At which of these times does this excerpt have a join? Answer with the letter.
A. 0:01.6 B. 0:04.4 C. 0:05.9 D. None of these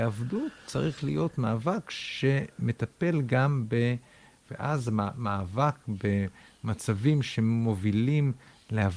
B